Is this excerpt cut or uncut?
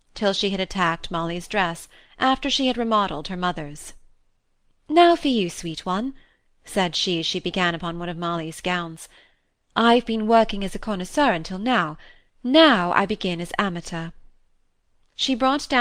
uncut